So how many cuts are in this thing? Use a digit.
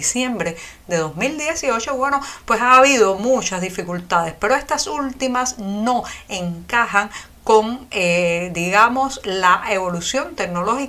0